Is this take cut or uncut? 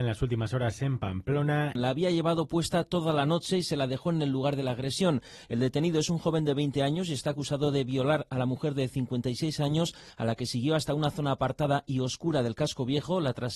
cut